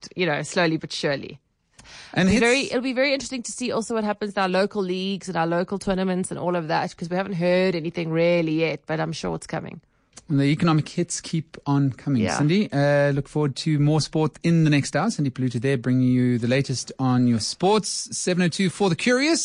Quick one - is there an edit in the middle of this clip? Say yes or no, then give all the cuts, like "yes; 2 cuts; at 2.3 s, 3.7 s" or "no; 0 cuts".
no; 0 cuts